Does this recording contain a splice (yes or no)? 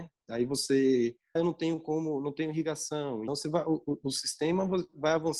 yes